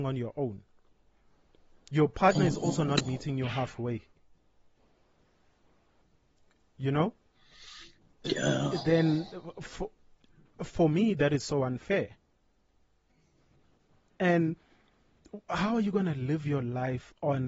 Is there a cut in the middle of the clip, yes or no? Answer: no